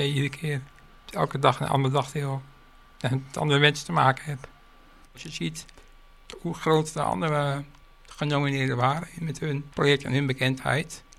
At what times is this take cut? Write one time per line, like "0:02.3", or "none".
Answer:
0:05.1
0:09.7